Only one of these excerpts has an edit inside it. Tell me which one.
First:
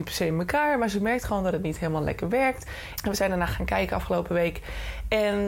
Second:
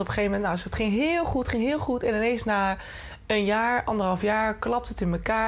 first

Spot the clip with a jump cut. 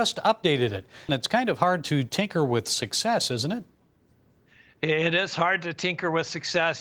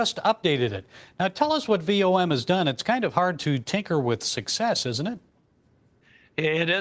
first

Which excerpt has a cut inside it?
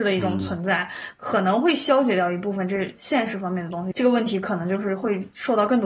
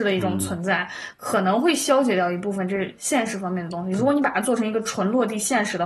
first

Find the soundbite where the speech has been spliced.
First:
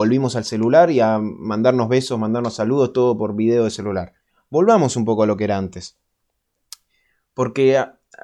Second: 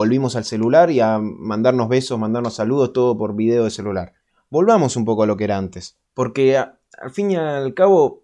second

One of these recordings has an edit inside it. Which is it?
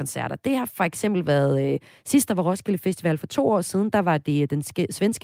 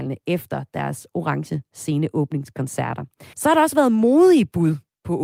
second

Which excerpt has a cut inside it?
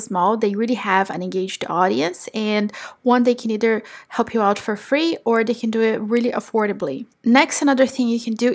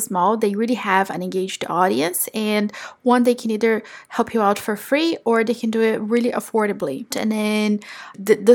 second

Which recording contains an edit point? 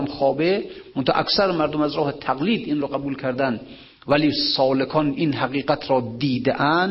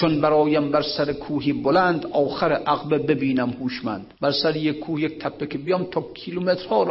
second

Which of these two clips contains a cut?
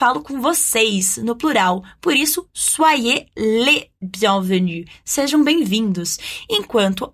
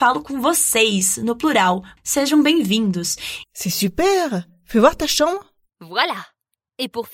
second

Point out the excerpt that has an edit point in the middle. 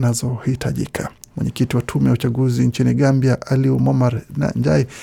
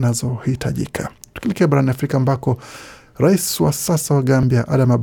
first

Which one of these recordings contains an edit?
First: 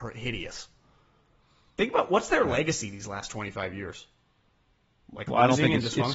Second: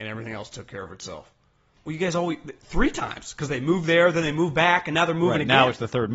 second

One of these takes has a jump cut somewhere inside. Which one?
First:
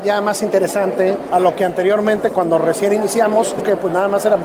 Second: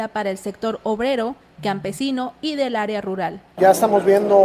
second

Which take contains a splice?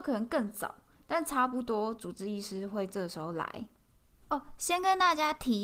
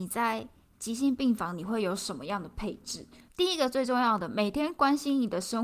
second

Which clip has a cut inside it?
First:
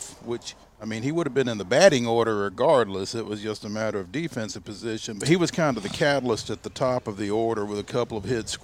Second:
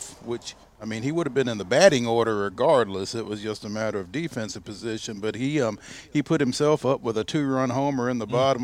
first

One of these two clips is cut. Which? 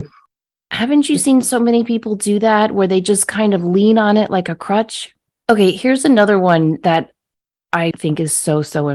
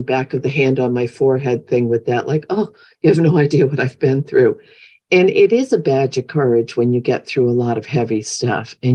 first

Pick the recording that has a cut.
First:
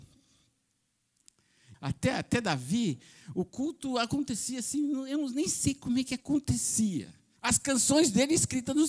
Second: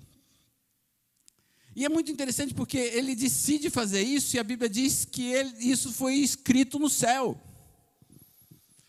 first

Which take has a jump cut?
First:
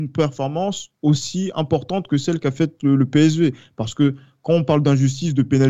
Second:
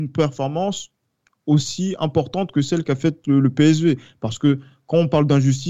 first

